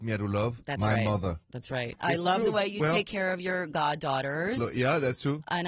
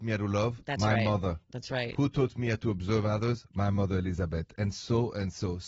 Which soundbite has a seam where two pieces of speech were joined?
first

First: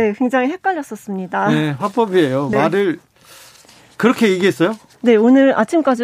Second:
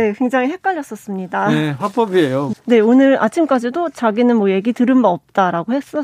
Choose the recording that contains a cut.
second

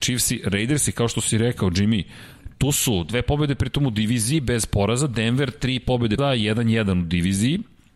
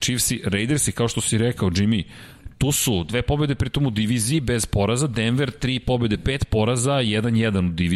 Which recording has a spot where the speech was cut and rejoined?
first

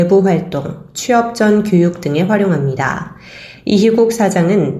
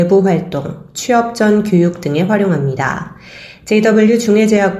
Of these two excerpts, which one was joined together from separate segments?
first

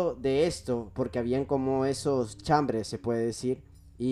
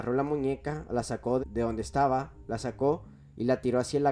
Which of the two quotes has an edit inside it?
second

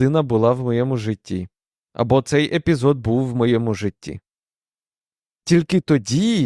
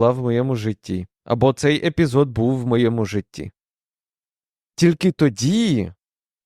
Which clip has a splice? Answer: second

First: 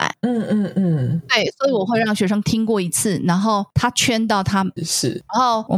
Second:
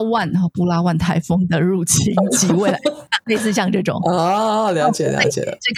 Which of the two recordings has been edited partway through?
first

